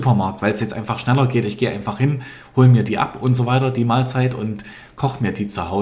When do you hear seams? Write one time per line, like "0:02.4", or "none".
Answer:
none